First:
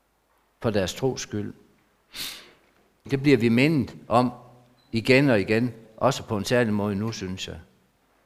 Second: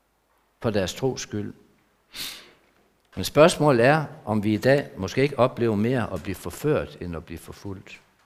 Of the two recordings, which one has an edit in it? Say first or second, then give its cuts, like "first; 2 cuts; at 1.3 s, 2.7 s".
first; 2 cuts; at 3.1 s, 5.8 s